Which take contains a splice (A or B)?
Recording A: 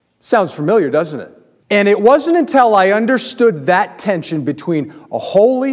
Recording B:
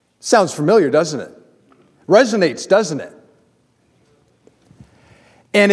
A